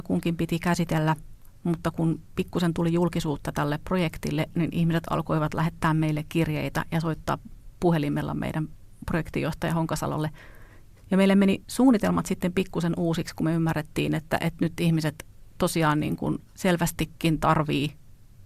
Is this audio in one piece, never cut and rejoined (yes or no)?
no